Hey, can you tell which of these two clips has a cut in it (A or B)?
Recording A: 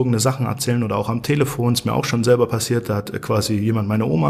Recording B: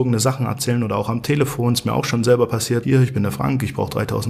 B